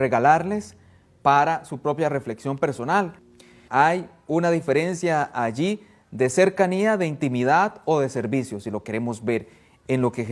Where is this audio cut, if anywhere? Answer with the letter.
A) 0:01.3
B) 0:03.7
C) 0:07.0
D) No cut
B